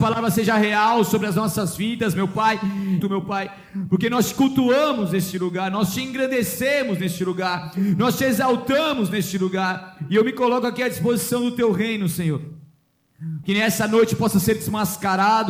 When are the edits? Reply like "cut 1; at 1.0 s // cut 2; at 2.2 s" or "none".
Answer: cut 1; at 3.0 s // cut 2; at 13.4 s